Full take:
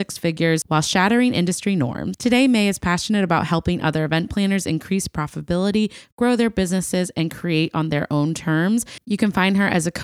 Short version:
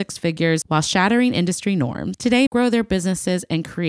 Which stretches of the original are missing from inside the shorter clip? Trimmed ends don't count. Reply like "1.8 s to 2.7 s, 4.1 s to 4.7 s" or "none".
2.5 s to 6.1 s